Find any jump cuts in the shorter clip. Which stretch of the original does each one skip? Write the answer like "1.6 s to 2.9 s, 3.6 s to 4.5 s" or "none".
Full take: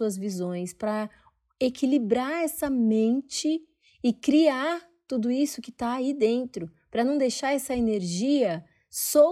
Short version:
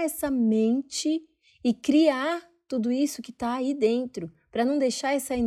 none